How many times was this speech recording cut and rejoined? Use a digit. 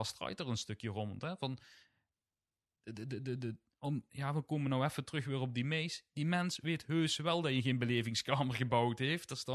0